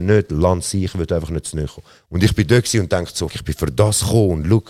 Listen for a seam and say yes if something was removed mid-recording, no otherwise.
yes